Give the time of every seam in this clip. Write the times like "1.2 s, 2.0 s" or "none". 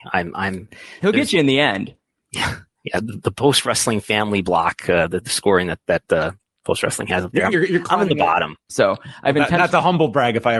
7.5 s, 8.7 s